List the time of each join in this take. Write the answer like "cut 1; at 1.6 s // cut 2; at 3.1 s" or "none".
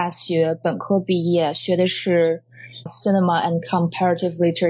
cut 1; at 2.9 s

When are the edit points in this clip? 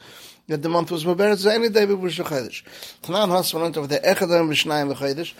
cut 1; at 3.0 s

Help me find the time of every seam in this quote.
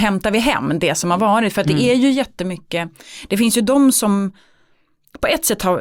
none

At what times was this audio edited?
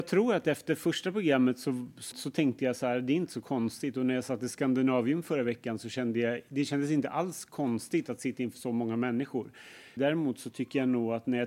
cut 1; at 2.1 s // cut 2; at 10.0 s

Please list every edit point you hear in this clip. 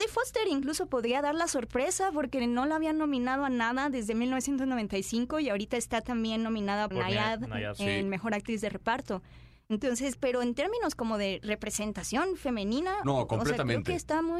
cut 1; at 6.9 s // cut 2; at 10.2 s

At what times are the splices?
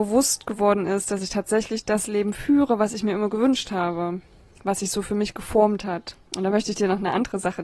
cut 1; at 6.3 s

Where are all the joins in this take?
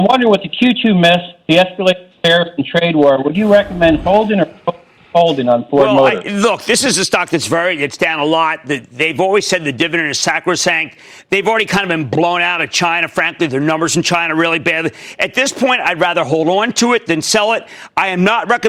none

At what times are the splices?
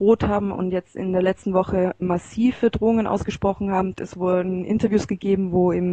cut 1; at 2.0 s // cut 2; at 3.9 s

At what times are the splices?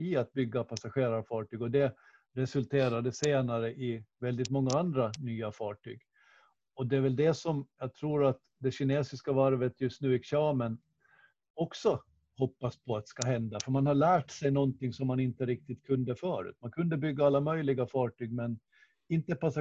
none

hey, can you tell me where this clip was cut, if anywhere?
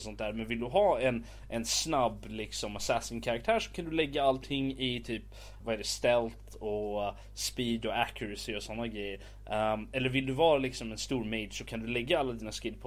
cut 1; at 5.6 s

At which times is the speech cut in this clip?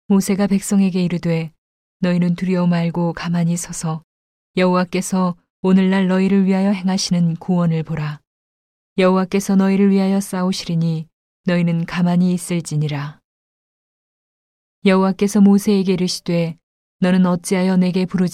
cut 1; at 8.8 s

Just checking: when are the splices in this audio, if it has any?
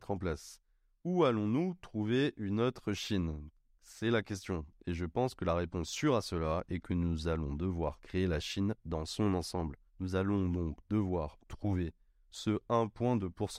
cut 1; at 9.9 s // cut 2; at 11.4 s

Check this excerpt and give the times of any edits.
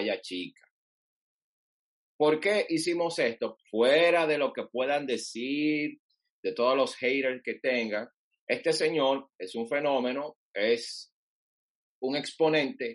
cut 1; at 3.6 s

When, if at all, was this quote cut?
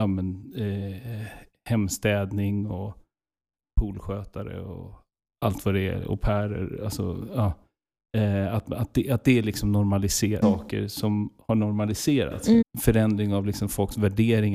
cut 1; at 10.4 s // cut 2; at 12.6 s

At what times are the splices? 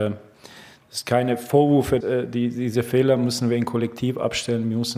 cut 1; at 2.0 s

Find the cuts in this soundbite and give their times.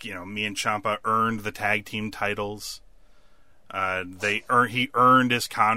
none

